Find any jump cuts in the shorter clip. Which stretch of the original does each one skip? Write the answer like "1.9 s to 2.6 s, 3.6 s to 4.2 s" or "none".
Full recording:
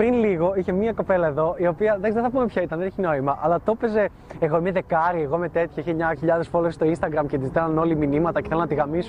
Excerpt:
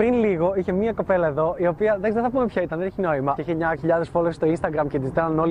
3.4 s to 5.8 s